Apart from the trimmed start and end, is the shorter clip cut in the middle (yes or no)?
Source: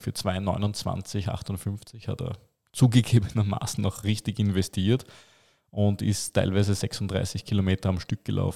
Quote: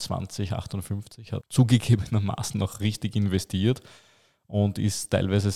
yes